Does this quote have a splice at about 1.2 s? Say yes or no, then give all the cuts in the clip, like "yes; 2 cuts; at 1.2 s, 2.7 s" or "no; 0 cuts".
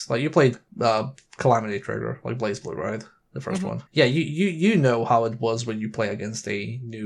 no; 1 cut; at 3.9 s